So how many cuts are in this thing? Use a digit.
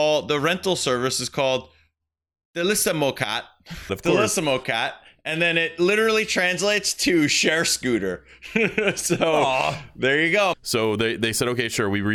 2